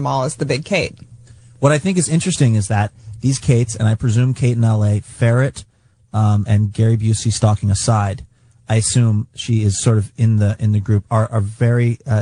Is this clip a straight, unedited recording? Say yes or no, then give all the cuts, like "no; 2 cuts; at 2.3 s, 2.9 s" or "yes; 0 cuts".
yes; 0 cuts